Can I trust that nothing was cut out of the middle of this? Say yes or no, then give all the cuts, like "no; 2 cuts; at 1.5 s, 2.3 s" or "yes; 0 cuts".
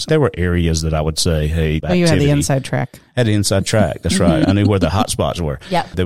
no; 1 cut; at 1.8 s